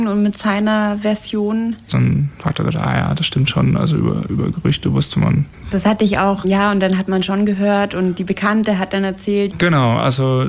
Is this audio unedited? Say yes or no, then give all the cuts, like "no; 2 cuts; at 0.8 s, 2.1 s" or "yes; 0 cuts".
no; 1 cut; at 1.9 s